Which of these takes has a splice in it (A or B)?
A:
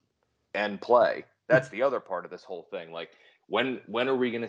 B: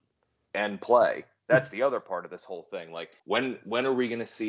B